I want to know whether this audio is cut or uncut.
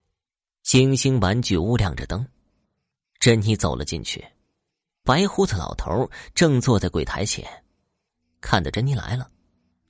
uncut